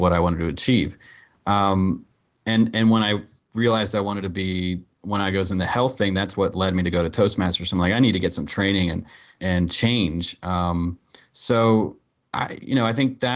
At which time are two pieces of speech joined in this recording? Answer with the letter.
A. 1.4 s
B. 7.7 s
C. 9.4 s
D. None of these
C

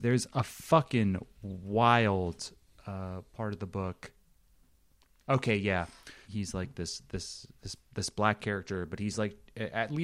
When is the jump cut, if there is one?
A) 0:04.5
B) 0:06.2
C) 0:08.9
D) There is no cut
B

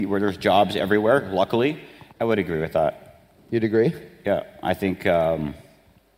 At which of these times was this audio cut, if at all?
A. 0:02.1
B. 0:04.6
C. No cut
A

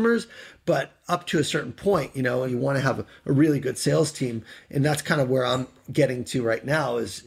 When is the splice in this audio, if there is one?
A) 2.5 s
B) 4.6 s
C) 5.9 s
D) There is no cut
A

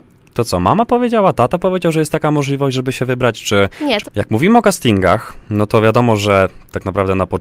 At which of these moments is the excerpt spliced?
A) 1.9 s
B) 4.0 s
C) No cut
B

